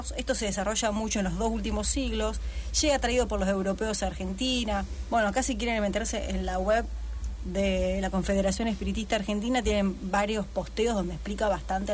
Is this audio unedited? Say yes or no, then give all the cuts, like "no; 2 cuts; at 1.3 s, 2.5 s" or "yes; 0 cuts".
yes; 0 cuts